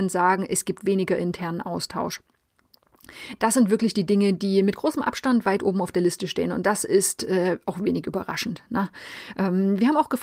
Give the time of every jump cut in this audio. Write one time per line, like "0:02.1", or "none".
none

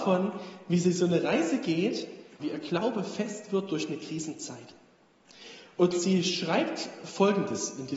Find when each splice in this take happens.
0:02.4

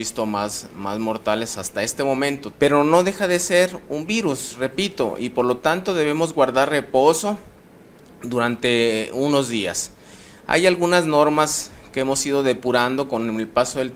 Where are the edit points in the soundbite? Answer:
0:02.5

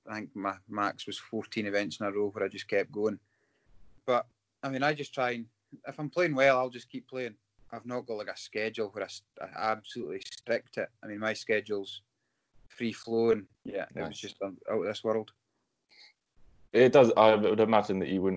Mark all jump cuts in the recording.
0:13.6

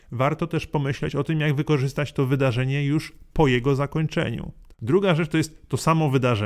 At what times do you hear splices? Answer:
0:04.7

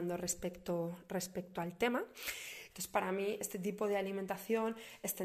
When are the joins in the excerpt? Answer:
0:02.7

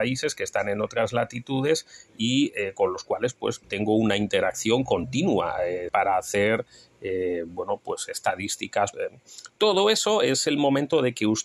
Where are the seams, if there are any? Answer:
0:03.6
0:05.9
0:08.9

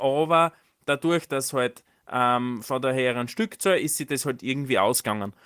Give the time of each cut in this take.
none

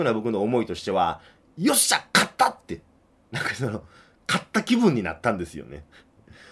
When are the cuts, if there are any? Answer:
none

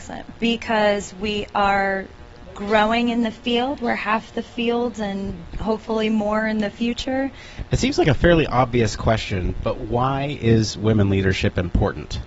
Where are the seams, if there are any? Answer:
0:07.7

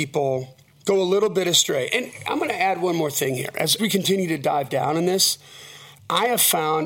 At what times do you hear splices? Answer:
none

